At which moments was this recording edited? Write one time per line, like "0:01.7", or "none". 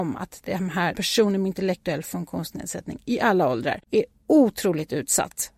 0:00.9
0:03.8

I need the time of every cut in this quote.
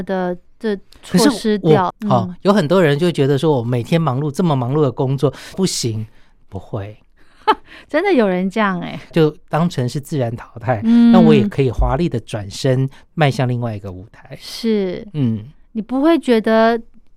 0:01.9
0:05.5
0:09.1

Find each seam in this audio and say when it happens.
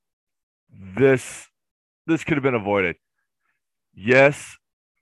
none

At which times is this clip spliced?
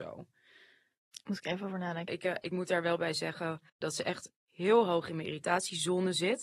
0:02.1
0:03.7

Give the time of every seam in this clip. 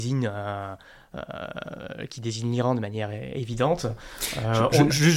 none

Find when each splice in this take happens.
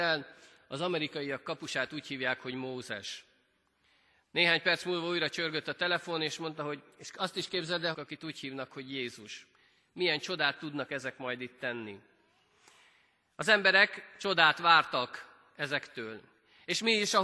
0:07.9

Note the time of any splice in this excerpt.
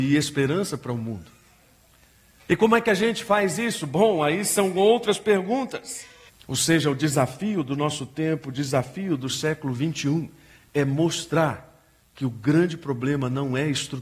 0:06.3

